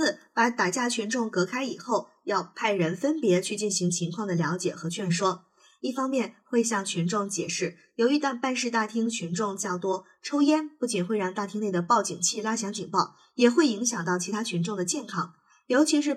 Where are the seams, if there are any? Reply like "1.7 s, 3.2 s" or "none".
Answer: none